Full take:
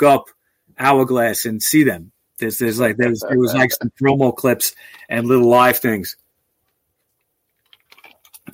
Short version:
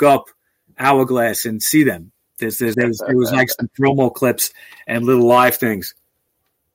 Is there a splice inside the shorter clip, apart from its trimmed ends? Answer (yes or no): yes